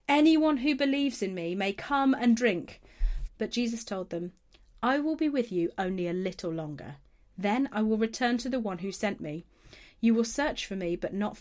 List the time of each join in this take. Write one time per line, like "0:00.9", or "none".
0:03.3